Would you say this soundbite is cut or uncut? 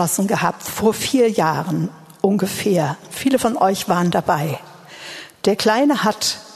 cut